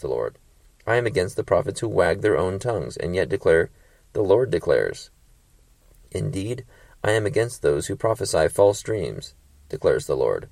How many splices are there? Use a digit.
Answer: 0